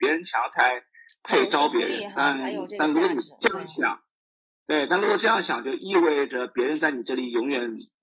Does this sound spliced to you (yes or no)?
no